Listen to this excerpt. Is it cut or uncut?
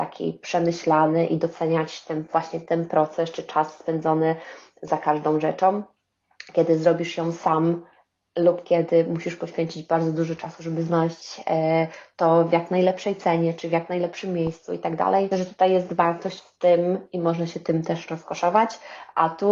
cut